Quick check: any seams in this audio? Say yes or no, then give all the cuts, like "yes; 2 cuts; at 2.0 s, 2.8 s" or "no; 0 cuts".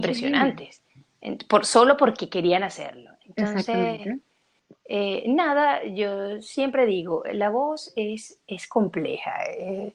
no; 0 cuts